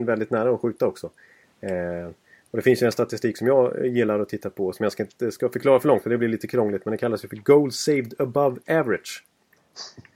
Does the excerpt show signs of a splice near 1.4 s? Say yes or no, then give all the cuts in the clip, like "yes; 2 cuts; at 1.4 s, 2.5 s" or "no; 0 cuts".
yes; 1 cut; at 1.4 s